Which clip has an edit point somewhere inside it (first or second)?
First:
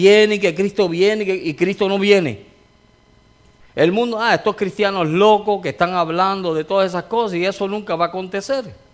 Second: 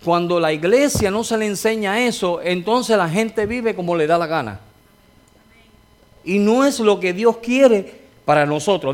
first